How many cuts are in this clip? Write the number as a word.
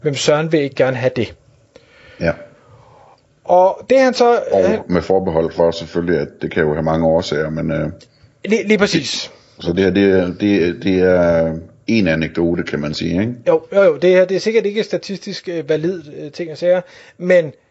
zero